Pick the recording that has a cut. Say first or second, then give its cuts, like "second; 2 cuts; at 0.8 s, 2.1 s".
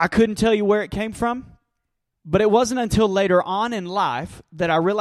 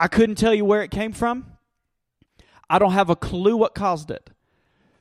first; 1 cut; at 2.1 s